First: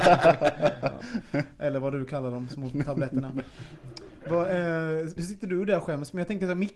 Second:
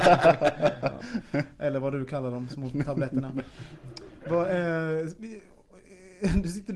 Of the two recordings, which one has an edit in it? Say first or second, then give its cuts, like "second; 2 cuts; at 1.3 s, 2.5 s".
first; 1 cut; at 5.2 s